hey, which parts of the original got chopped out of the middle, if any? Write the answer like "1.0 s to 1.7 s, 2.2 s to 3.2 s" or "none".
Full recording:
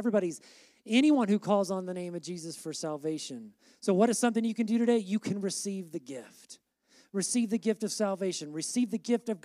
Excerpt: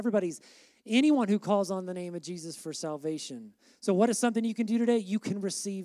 none